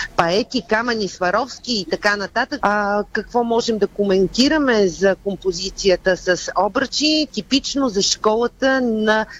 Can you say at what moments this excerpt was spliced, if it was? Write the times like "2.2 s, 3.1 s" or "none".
2.6 s, 7.3 s